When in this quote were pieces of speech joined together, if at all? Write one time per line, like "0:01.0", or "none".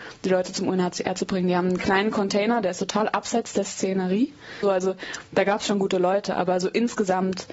0:04.6